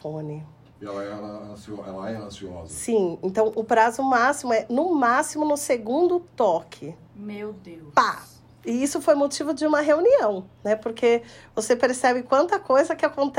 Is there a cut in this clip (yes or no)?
no